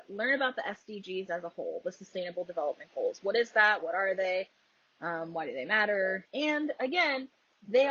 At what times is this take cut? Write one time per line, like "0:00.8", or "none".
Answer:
0:06.3